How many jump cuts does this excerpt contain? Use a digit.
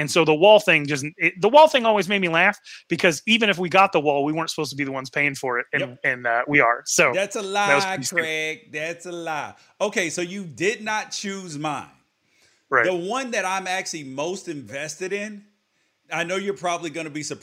0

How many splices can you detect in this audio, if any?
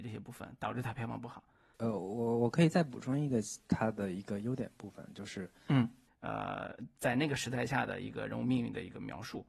2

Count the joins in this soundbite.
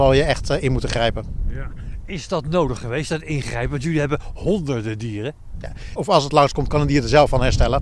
1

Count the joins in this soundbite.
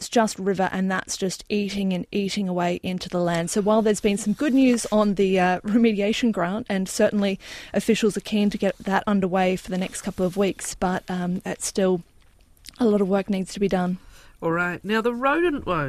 0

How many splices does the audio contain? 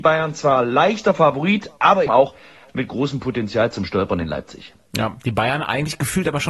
1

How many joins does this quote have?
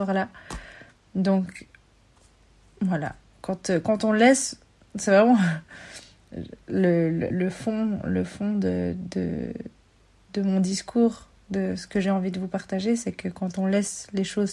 1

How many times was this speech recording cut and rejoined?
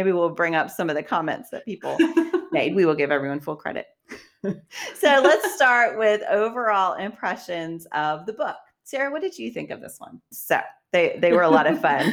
1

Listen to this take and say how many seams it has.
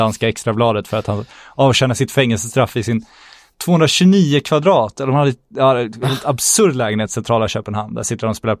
0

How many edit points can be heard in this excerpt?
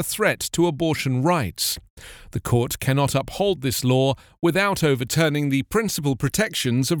0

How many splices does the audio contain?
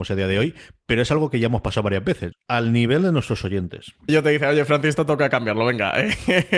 2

